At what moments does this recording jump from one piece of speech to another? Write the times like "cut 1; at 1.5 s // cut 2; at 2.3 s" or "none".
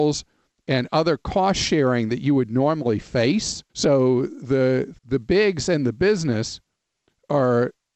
cut 1; at 3.7 s // cut 2; at 5.0 s